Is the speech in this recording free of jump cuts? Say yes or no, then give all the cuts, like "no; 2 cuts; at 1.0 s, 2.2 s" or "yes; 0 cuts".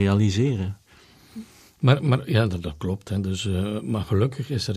no; 1 cut; at 1.8 s